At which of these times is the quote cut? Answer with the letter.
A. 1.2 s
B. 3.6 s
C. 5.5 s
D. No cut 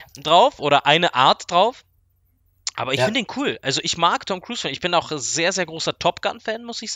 D